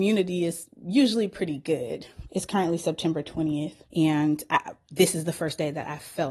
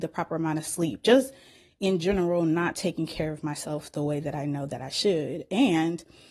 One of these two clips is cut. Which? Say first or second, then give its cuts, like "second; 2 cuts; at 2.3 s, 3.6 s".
first; 2 cuts; at 2.3 s, 3.8 s